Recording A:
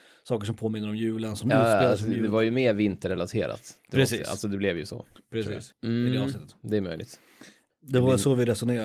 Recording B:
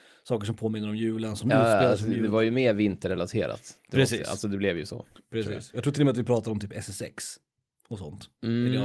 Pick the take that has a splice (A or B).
A